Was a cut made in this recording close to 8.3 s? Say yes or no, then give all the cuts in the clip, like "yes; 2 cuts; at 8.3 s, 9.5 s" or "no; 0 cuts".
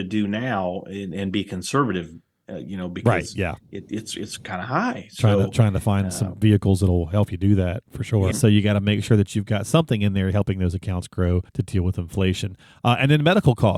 yes; 2 cuts; at 8.3 s, 11.5 s